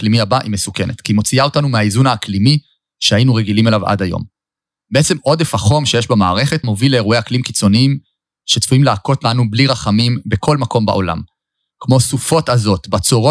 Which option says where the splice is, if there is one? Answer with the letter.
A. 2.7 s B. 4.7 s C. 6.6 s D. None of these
C